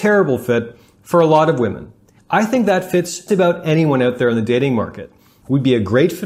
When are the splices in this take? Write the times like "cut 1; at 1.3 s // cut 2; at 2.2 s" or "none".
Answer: cut 1; at 2.2 s // cut 2; at 3.3 s